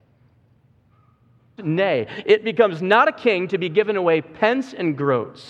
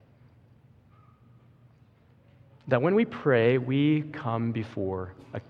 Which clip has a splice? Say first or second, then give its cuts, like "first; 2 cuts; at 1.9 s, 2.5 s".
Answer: first; 1 cut; at 1.6 s